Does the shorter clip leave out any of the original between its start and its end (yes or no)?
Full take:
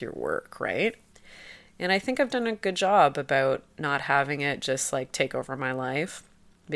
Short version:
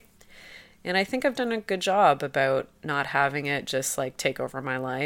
no